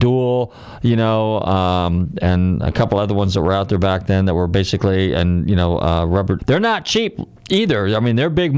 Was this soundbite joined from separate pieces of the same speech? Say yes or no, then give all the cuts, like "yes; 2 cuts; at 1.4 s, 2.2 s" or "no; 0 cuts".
yes; 1 cut; at 6.4 s